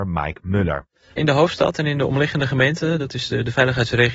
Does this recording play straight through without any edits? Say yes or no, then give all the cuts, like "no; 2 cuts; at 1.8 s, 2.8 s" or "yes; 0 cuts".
yes; 0 cuts